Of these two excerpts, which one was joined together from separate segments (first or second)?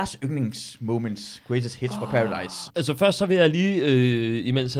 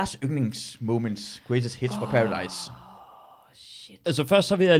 first